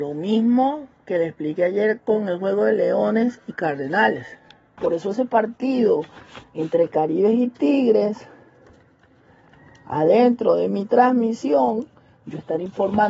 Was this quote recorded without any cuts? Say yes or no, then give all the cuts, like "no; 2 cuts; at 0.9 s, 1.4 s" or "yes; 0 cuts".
no; 1 cut; at 4.8 s